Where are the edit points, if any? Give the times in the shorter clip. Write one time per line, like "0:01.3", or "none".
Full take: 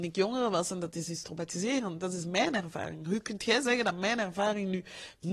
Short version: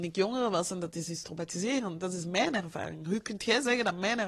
none